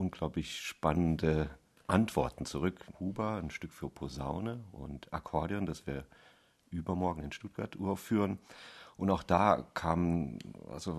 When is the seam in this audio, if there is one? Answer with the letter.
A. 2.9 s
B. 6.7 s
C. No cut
A